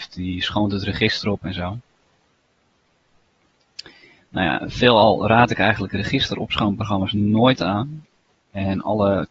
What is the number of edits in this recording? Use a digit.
1